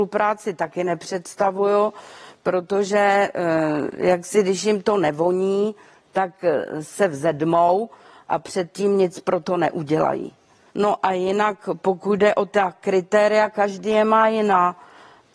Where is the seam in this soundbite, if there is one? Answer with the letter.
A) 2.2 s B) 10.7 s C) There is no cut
B